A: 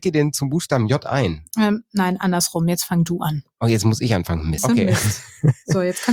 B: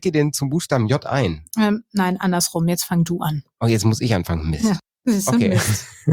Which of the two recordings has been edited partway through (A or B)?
A